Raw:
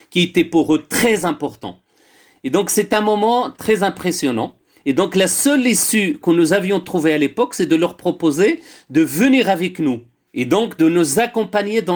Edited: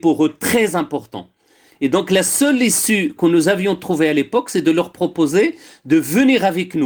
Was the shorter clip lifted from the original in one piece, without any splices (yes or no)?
no